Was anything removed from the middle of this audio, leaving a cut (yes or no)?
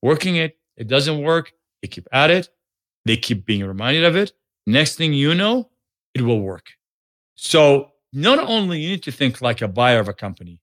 no